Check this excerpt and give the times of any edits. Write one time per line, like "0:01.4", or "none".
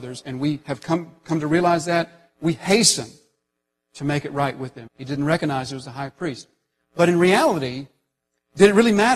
0:04.9